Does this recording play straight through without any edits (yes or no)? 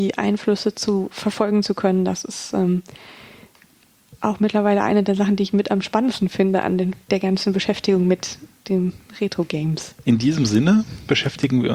no